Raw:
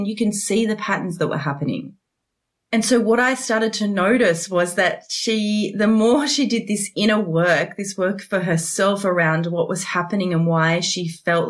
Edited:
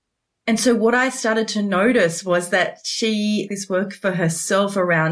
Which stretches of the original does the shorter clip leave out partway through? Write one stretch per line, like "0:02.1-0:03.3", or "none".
0:05.7-0:07.7

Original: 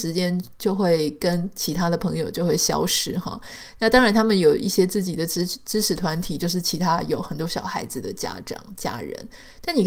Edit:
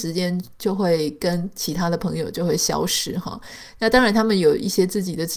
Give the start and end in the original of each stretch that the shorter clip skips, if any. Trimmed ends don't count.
none

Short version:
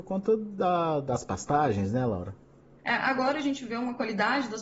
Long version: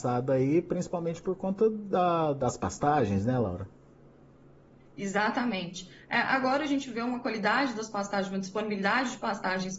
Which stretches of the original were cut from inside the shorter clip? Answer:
0:04.1-0:06.0

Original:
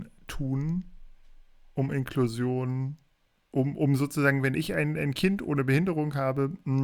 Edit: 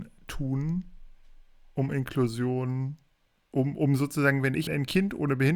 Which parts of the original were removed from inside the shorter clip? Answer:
0:04.7-0:04.9

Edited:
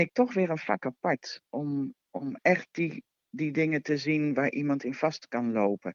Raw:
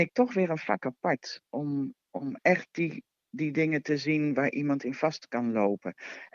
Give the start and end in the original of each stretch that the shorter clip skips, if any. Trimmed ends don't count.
none

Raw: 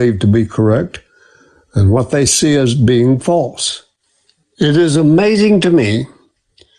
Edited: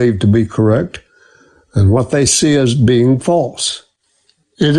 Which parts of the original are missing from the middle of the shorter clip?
none

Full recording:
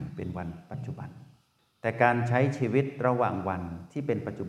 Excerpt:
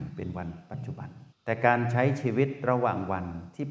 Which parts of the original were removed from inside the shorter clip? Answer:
0:01.3-0:01.7

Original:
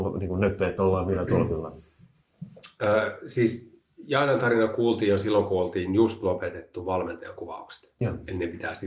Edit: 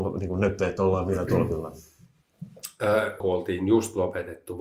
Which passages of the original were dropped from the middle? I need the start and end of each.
0:03.2-0:05.5

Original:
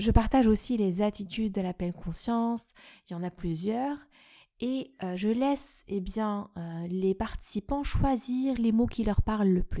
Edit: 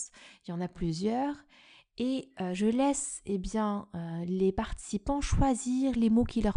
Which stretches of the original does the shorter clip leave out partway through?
none

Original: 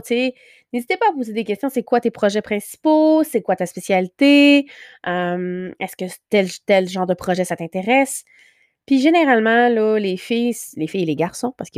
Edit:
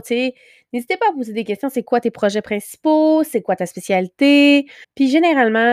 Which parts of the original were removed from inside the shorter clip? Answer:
0:04.8-0:08.7

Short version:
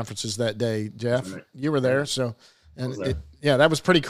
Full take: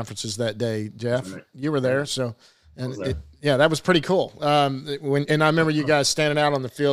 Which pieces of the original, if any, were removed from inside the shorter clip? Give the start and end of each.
none

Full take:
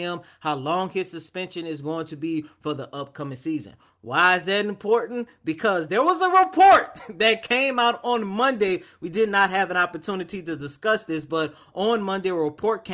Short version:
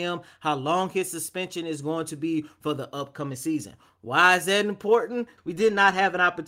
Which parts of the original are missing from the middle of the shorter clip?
0:05.4-0:08.9

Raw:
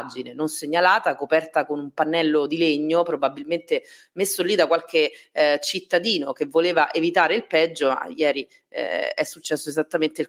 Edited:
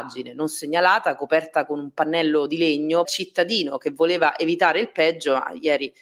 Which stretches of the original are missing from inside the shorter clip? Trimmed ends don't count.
0:03.0-0:05.6

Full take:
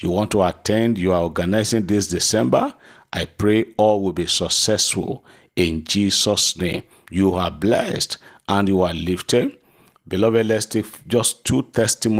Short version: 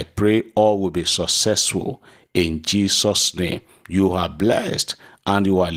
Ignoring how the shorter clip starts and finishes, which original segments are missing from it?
none

